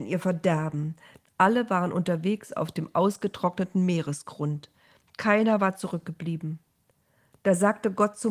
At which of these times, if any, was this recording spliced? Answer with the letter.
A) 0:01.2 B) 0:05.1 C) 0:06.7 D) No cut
A